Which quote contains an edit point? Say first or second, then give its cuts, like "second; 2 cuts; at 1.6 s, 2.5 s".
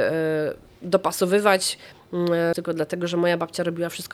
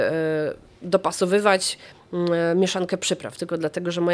first; 1 cut; at 2.5 s